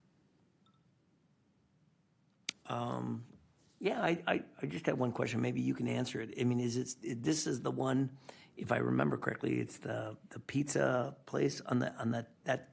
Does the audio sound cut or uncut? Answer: cut